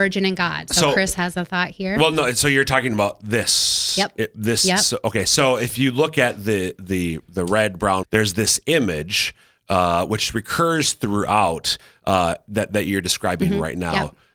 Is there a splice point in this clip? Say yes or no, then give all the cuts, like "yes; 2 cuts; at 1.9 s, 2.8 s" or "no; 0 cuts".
yes; 1 cut; at 8.0 s